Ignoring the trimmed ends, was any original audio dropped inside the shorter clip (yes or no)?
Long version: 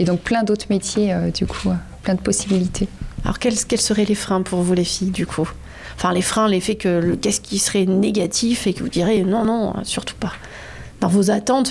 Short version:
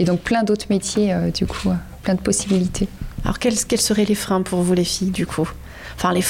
no